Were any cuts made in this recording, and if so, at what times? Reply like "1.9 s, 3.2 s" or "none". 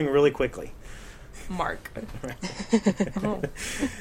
1.3 s